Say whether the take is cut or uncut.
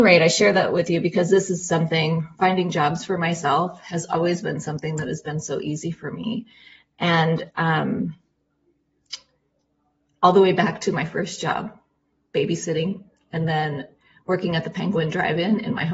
uncut